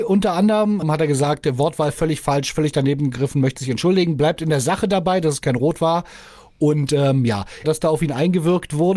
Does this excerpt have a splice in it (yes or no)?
yes